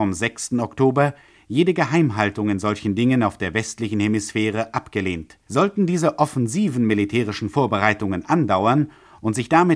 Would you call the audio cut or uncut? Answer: cut